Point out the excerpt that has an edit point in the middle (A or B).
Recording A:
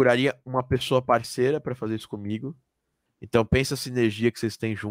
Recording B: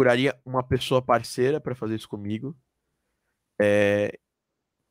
A